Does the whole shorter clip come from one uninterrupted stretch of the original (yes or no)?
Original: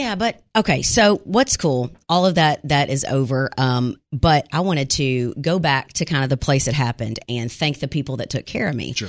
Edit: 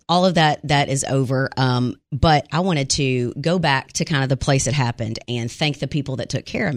yes